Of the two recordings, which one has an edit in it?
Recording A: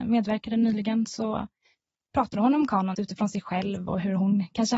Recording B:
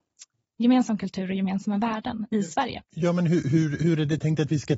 A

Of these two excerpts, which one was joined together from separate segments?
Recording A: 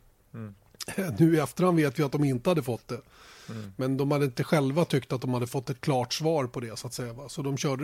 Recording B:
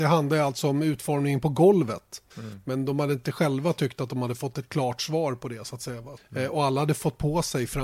B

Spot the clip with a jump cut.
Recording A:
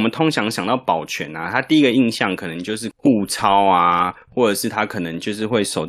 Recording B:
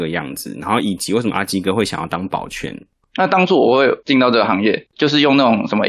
B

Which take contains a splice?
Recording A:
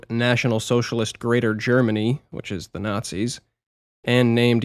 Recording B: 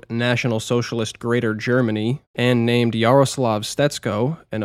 B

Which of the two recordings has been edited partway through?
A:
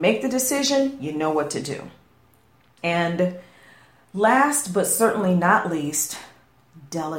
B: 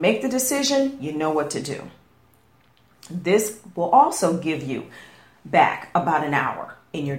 A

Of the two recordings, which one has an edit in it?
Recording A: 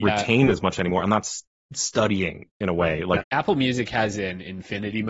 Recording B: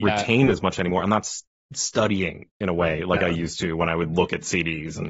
A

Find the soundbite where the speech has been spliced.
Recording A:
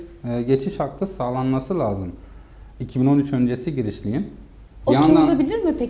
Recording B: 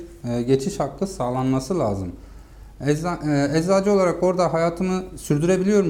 A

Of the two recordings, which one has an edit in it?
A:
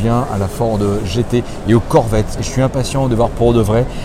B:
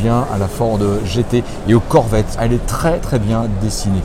B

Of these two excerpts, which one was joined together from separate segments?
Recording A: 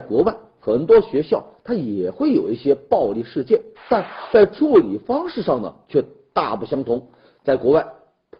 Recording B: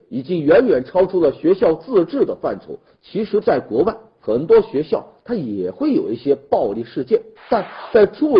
B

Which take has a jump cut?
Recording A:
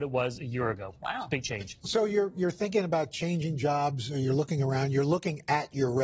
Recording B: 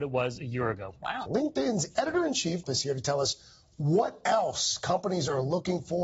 B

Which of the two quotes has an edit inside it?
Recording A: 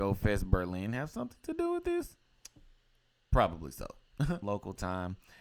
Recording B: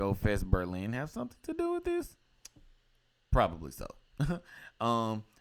A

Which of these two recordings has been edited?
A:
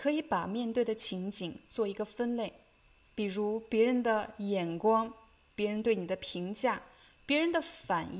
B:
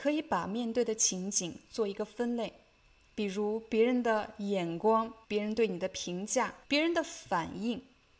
B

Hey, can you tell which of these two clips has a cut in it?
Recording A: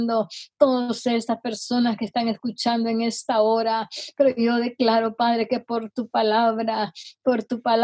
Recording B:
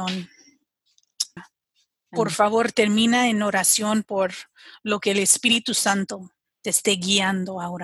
B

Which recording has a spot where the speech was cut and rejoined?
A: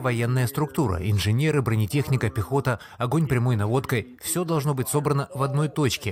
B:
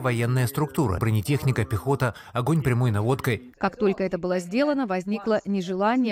B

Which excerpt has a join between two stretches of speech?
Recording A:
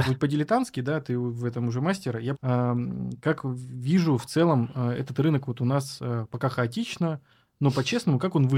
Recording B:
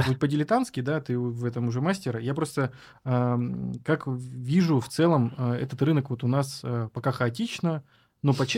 A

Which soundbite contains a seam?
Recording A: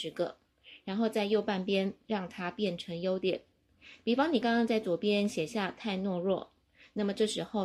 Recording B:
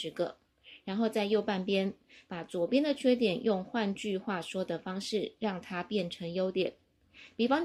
A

